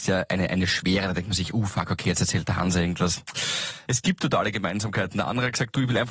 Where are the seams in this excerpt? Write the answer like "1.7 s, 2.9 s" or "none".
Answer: 3.8 s